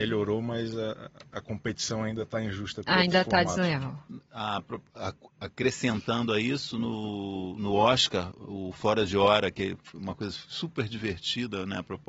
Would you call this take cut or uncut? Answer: uncut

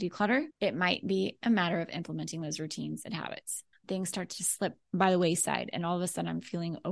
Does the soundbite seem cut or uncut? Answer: cut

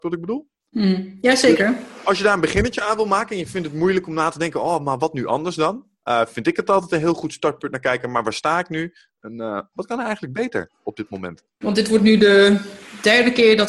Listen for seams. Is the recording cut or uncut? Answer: cut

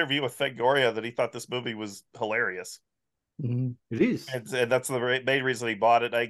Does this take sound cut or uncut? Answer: uncut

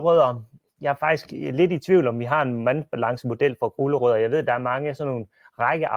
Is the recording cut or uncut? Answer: uncut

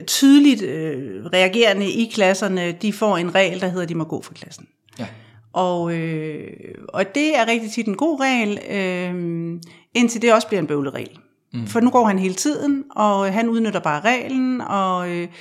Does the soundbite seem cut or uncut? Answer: uncut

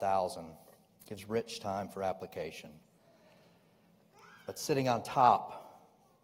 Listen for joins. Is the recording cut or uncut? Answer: uncut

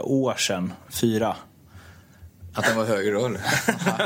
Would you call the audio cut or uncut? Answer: cut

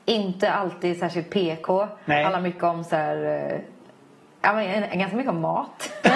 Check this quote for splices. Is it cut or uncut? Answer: uncut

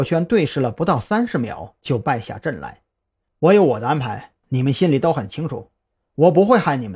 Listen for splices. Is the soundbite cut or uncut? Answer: cut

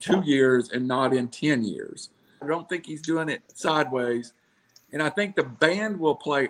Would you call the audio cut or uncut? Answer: cut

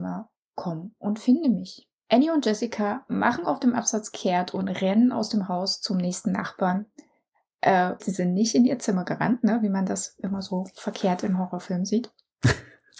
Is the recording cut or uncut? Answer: cut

